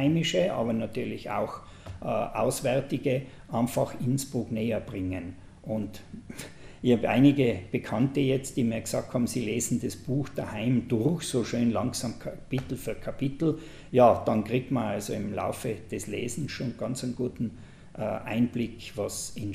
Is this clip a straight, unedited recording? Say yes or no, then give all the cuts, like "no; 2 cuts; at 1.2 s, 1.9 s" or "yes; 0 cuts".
yes; 0 cuts